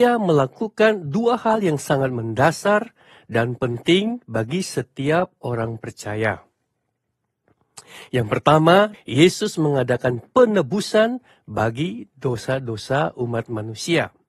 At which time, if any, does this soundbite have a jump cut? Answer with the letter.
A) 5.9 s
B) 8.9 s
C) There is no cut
B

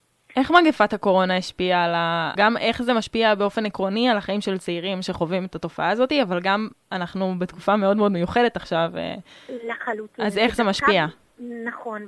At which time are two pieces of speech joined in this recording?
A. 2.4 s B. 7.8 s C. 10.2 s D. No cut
A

